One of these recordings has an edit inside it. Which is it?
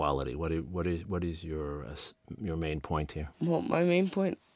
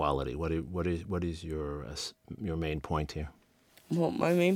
first; 1 cut; at 3.3 s

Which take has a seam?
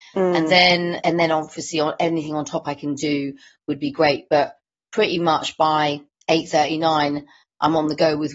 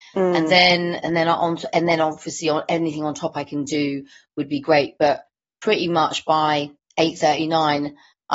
first; 1 cut; at 1.0 s

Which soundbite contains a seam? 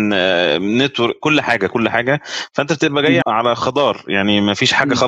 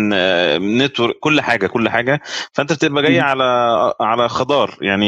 first; 1 cut; at 3.2 s

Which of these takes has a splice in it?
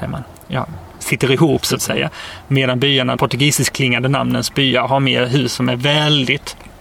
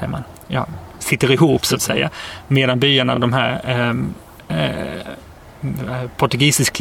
first; 1 cut; at 3.2 s

